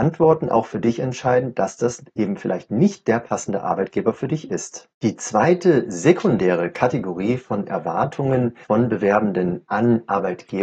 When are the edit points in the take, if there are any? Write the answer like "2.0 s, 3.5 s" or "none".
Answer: 4.9 s, 8.6 s